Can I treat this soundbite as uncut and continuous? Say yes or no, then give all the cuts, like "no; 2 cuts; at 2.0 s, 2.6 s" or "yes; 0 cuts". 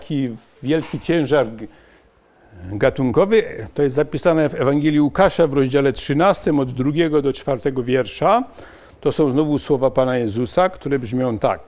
yes; 0 cuts